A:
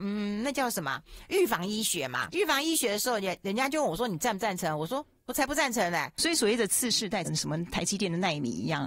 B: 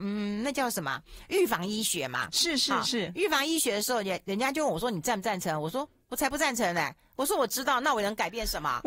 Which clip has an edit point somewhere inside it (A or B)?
A